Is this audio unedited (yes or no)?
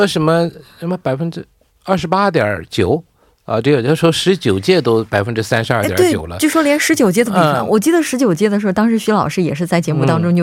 yes